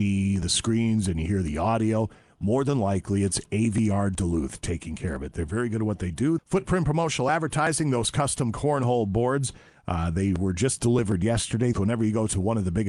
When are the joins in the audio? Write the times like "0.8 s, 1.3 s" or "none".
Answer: 6.4 s, 11.7 s